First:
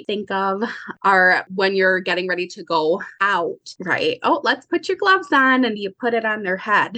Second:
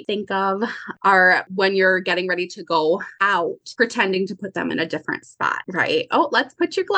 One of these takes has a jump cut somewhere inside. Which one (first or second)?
first